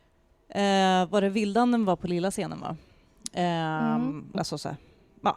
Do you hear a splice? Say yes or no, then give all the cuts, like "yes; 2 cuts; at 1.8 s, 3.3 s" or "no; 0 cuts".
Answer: yes; 1 cut; at 4.3 s